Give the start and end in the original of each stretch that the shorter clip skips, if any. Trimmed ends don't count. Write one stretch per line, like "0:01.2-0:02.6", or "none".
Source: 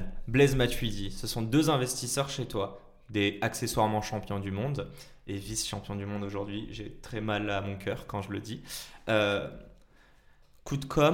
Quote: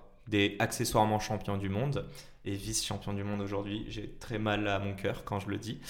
none